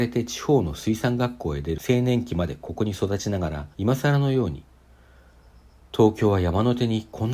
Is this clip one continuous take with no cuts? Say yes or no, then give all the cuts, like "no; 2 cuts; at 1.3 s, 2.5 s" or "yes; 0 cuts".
no; 1 cut; at 3.7 s